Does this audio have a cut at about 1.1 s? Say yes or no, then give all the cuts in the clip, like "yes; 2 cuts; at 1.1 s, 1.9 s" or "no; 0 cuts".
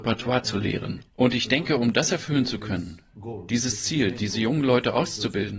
no; 0 cuts